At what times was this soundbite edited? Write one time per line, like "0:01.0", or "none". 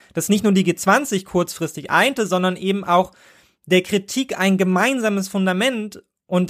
none

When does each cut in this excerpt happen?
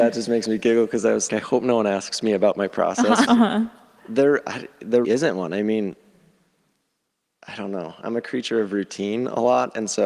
0:01.3
0:03.3
0:05.0

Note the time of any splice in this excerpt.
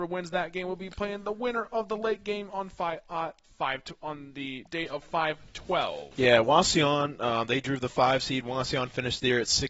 none

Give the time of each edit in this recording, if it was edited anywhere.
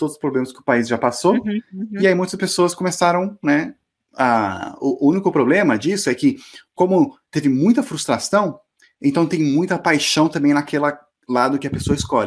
none

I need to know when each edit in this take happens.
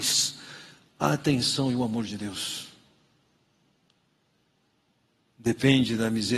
none

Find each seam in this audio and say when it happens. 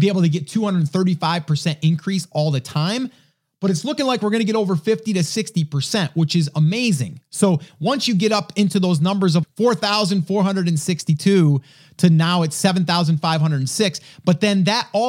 0:09.4

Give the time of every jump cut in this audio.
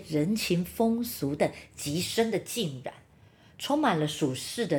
0:01.4

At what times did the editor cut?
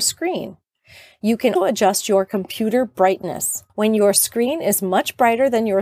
0:01.6
0:03.7

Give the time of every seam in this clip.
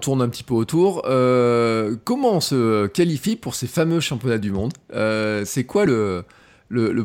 none

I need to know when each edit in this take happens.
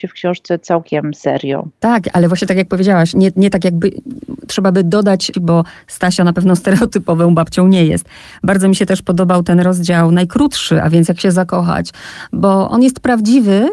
0:05.3

